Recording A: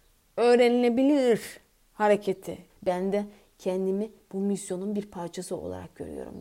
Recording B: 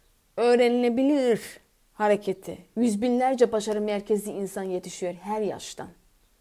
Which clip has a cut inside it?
A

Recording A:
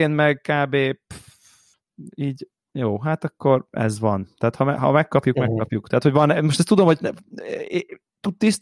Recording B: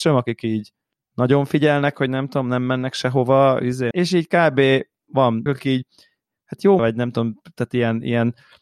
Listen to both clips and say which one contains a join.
B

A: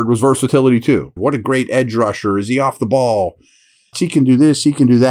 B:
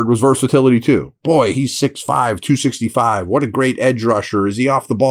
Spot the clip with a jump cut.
A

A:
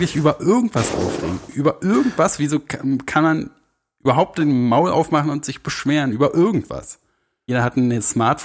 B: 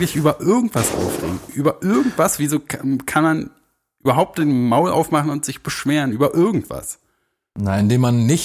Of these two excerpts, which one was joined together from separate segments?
A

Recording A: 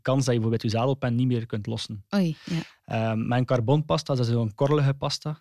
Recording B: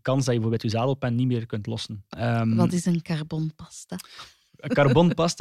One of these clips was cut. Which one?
B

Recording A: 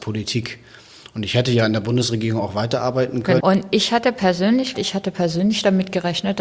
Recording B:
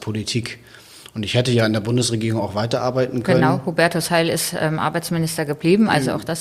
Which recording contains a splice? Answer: A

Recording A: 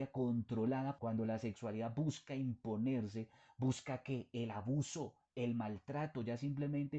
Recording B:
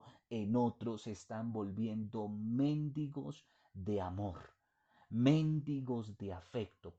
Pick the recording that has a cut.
A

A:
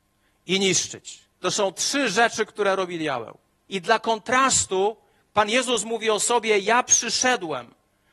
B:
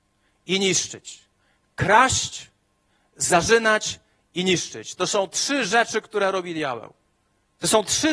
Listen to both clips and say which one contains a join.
A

